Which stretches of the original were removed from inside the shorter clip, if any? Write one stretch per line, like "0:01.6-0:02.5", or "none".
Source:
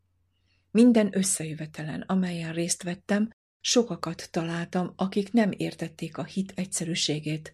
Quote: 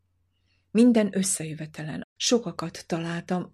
0:02.0-0:03.5